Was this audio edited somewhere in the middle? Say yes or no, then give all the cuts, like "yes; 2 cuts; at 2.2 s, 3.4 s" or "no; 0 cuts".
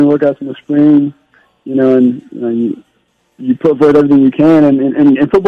no; 0 cuts